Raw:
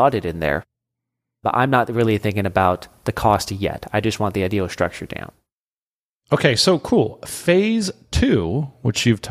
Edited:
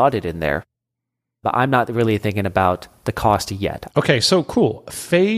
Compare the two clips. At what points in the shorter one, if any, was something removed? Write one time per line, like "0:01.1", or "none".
0:03.9